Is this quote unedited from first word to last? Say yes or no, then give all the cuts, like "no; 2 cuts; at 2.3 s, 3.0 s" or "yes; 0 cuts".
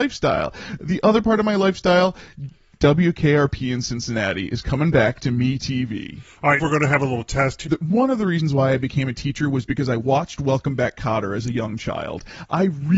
no; 2 cuts; at 6.6 s, 7.7 s